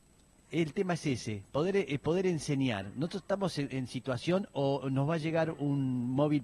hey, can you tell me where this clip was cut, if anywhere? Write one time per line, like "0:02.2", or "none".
none